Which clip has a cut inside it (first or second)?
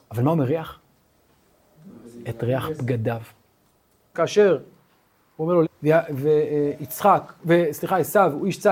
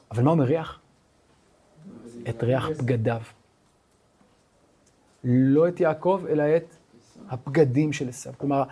first